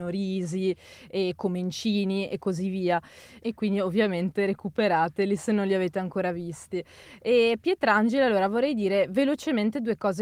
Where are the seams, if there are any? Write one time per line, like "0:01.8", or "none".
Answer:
0:03.4

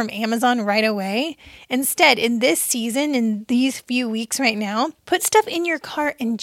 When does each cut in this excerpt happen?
0:05.0

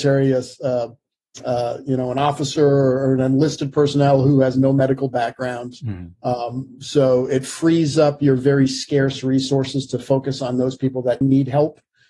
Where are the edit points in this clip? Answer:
0:11.2

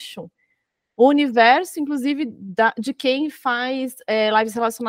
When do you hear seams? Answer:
none

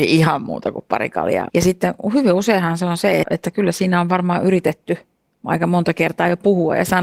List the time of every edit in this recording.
0:01.5
0:03.2

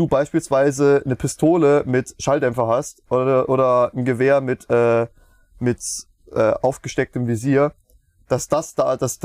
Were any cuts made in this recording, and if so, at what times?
none

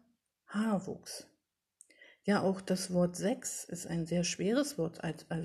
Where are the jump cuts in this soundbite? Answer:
none

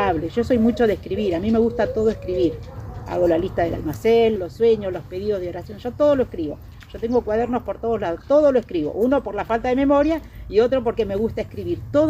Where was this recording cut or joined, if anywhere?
0:04.4

